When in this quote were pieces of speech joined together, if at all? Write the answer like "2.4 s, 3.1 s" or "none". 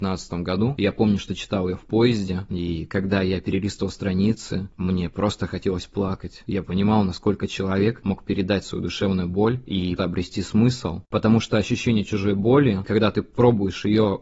10.0 s, 11.0 s